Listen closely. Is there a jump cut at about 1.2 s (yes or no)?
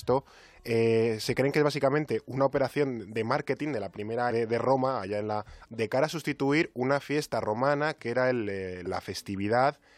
no